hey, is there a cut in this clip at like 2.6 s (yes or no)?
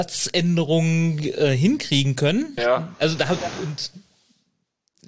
yes